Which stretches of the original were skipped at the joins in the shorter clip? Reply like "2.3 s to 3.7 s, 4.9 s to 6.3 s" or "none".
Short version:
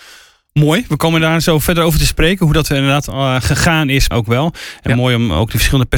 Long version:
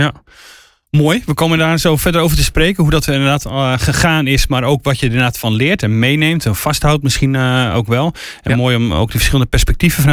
4.5 s to 7.7 s